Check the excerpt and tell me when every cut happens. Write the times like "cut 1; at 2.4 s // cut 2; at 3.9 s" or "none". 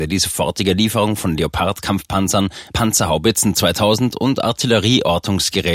cut 1; at 2.7 s